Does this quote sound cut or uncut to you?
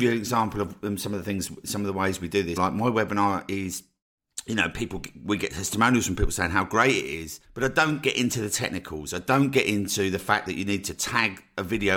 cut